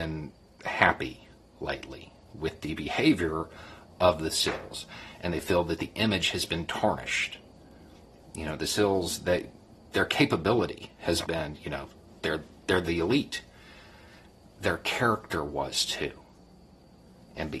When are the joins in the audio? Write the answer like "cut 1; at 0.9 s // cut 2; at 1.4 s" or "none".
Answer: cut 1; at 11.2 s